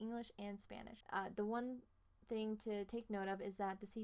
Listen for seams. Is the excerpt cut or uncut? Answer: cut